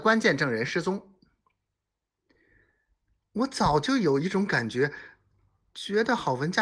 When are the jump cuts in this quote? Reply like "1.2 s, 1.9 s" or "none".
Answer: 3.2 s